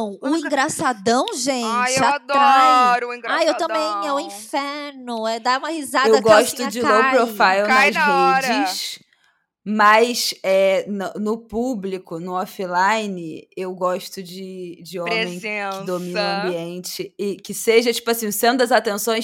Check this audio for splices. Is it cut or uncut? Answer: uncut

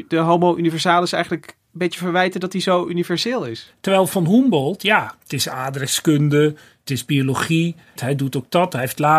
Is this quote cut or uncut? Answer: cut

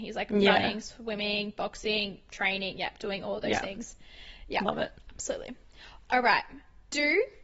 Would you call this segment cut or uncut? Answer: uncut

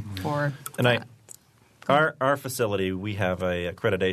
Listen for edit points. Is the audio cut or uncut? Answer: uncut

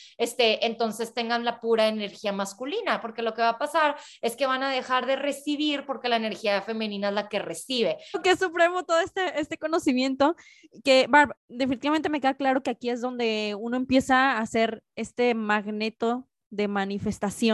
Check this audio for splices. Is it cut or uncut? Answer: cut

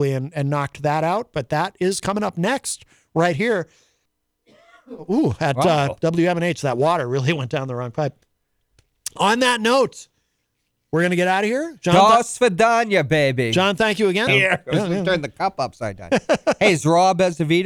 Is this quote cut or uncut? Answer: cut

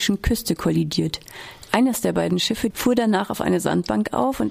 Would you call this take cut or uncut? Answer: cut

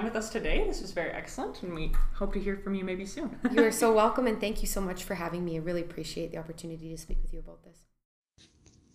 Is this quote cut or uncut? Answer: uncut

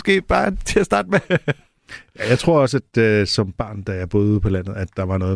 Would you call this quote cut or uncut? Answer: uncut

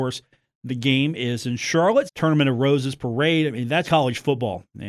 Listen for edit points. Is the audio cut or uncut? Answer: cut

